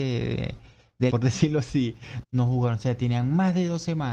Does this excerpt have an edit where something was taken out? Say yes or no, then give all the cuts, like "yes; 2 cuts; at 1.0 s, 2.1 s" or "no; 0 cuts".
yes; 2 cuts; at 1.1 s, 2.2 s